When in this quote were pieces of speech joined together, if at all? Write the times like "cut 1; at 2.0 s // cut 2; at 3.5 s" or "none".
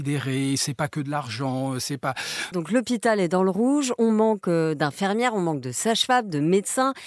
cut 1; at 2.5 s